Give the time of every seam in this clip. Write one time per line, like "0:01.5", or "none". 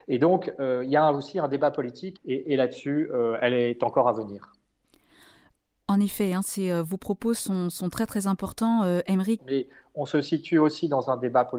0:02.2
0:09.4